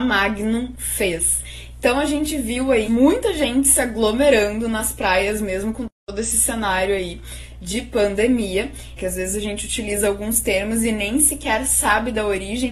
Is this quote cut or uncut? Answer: cut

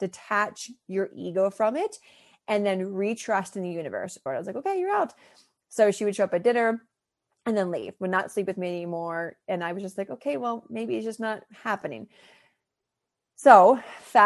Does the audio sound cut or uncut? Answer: cut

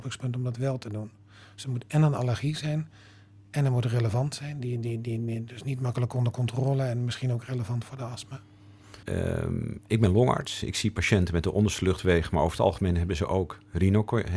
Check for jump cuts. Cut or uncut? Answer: cut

